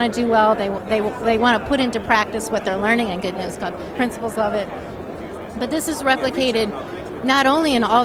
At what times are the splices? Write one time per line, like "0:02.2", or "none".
0:03.9